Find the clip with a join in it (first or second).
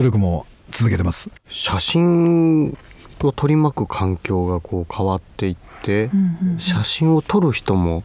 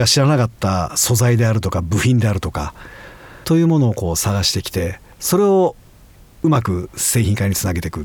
first